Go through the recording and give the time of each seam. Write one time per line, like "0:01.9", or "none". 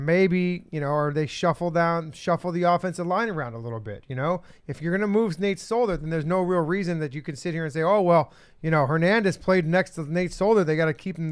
none